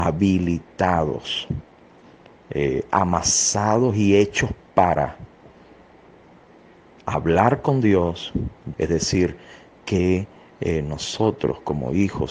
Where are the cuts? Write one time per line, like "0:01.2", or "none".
0:08.7

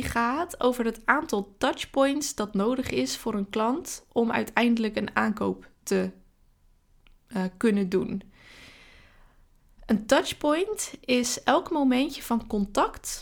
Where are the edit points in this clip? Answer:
none

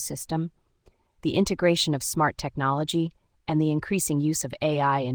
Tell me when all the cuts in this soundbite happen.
none

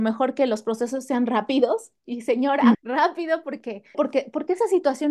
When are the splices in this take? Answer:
0:02.7
0:03.9

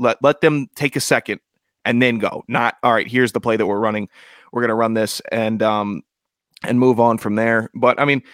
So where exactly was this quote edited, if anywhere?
none

